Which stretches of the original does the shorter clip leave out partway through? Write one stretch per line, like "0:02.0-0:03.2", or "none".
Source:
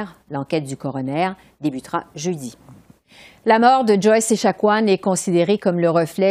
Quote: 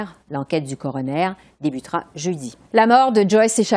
0:02.6-0:03.4